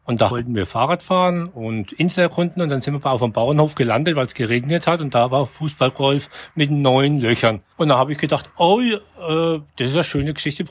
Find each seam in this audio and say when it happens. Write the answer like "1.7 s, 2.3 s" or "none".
none